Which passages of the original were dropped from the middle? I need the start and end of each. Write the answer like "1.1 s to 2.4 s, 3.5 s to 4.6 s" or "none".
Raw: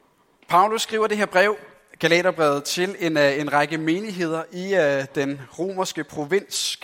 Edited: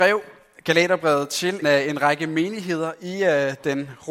3.0 s to 3.1 s